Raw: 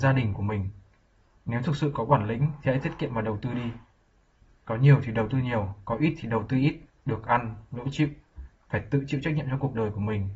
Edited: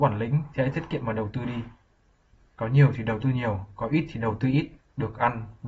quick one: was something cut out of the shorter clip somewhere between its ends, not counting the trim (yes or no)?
no